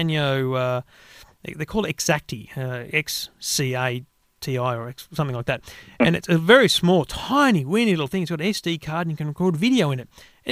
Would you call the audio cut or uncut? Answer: uncut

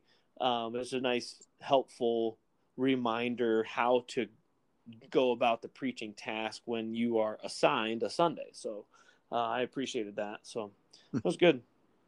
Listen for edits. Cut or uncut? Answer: uncut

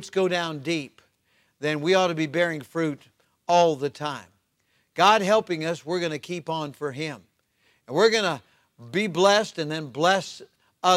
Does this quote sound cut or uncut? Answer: uncut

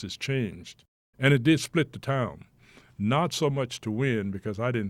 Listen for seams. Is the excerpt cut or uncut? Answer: cut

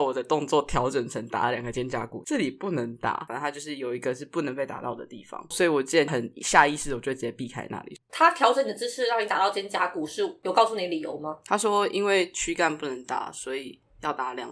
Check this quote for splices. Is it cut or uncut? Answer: cut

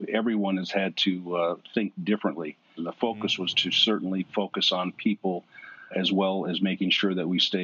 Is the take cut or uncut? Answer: cut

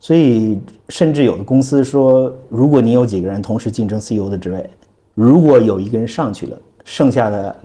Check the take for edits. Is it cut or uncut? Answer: uncut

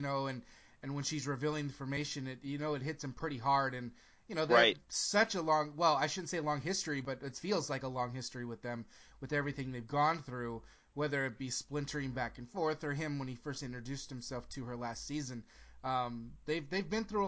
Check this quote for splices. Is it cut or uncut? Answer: uncut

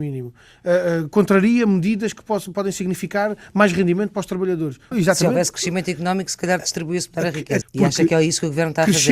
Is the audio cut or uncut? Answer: cut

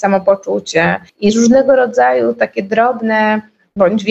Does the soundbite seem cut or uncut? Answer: cut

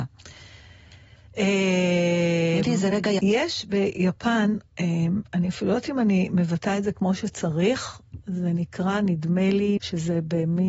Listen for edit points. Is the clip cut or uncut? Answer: cut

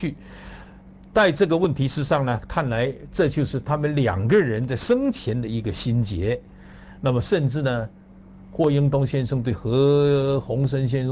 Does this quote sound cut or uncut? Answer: uncut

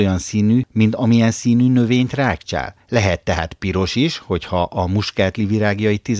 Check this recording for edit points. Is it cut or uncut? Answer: uncut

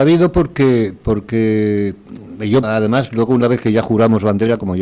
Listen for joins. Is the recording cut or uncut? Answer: cut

